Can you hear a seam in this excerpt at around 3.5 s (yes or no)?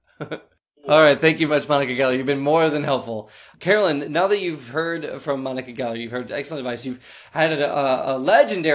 yes